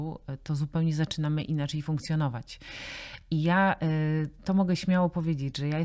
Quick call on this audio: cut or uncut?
uncut